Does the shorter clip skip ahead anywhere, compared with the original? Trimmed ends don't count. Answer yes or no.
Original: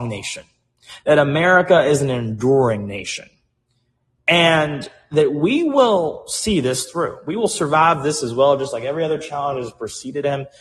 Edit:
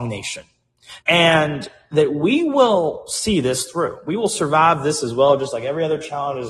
yes